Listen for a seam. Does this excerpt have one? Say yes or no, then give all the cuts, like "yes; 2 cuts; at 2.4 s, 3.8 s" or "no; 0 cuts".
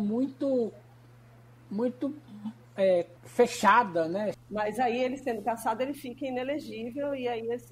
yes; 2 cuts; at 3.2 s, 4.3 s